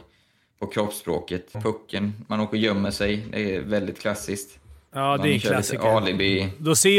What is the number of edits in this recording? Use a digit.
1